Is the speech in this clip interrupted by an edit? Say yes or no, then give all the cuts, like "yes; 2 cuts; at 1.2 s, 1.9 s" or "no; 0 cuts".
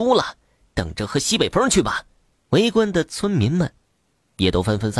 yes; 1 cut; at 2.4 s